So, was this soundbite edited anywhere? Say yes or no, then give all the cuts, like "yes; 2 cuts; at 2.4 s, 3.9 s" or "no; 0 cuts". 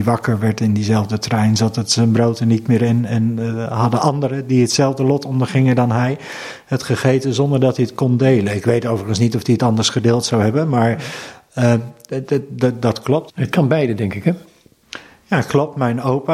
yes; 1 cut; at 13.3 s